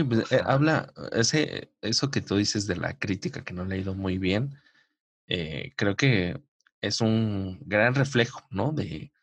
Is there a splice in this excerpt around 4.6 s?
no; 0 cuts

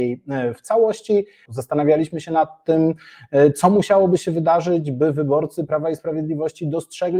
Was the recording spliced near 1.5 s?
yes; 1 cut; at 1.5 s

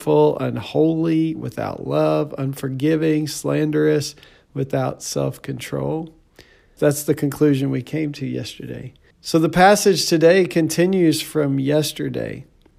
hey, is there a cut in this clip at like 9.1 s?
yes; 2 cuts; at 6.8 s, 9.1 s

